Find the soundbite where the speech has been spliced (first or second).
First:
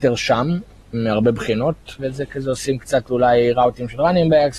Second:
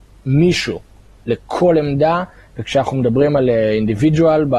first